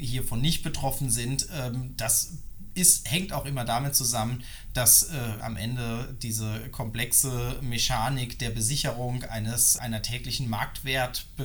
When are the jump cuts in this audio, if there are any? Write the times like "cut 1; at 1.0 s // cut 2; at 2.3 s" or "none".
cut 1; at 5.4 s // cut 2; at 9.8 s